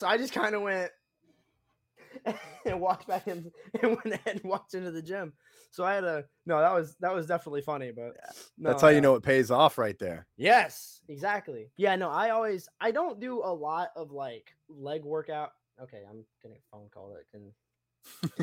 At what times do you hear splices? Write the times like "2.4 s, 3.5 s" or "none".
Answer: none